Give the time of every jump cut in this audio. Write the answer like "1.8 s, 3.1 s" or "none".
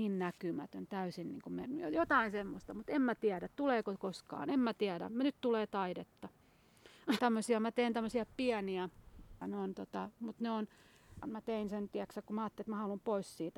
7.2 s, 9.4 s, 11.2 s